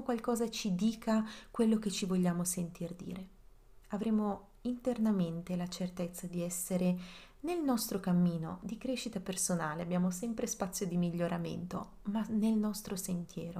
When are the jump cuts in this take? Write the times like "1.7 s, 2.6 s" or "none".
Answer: 3.8 s